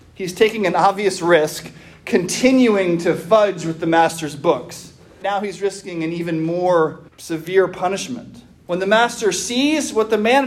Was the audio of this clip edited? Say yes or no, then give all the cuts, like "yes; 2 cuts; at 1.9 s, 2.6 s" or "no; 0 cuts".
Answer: yes; 3 cuts; at 5.2 s, 7.1 s, 8.5 s